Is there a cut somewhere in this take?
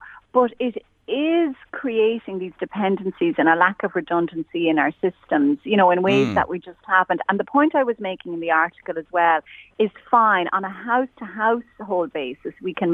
no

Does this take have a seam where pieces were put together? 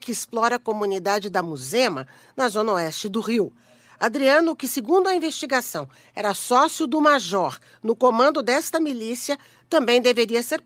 no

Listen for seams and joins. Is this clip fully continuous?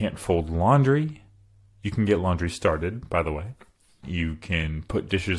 no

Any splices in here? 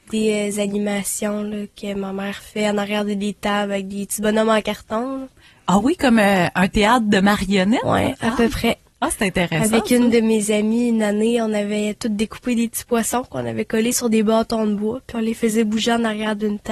no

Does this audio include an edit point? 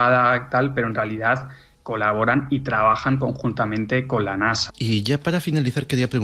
yes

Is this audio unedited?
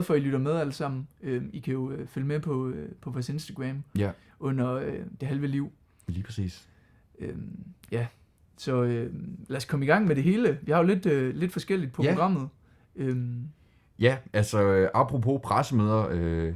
yes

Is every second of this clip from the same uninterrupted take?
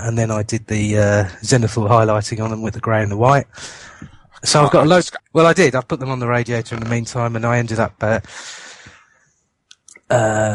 no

